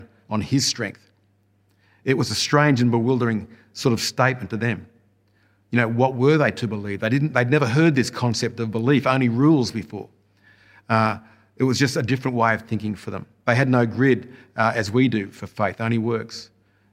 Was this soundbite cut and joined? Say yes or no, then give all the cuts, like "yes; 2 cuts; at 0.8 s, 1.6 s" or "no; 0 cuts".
no; 0 cuts